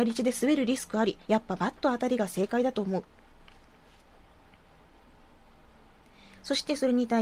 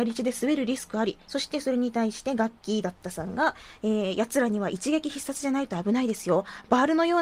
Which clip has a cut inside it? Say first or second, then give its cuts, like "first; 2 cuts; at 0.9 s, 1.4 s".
second; 1 cut; at 1.3 s